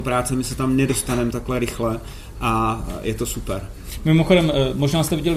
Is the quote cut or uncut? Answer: uncut